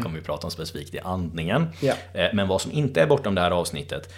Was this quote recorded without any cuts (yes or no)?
yes